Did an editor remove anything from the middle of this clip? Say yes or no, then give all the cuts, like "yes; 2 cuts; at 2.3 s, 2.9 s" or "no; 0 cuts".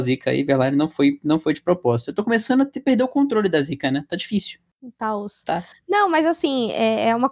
no; 0 cuts